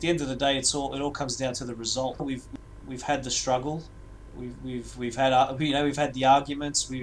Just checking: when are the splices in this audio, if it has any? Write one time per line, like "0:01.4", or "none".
0:02.2